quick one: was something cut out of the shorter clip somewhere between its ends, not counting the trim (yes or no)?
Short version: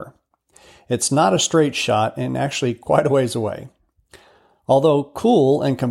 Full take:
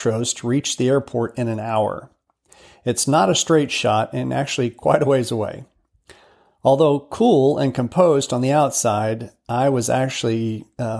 no